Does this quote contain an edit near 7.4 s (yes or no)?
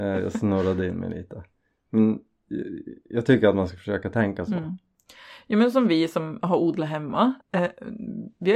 yes